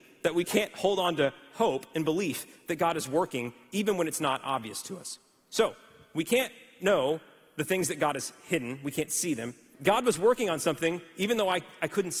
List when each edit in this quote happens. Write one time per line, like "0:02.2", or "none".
0:09.7